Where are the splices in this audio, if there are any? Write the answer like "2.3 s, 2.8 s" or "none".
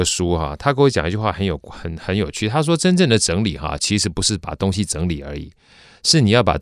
none